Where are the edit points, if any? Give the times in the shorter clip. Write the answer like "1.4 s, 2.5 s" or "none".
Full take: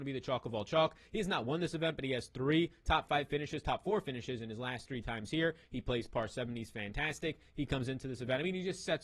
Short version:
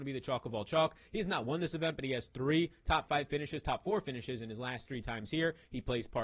none